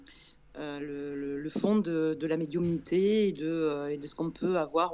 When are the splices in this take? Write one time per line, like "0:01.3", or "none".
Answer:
none